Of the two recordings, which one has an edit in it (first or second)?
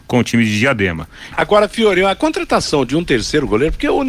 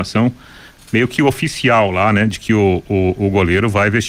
first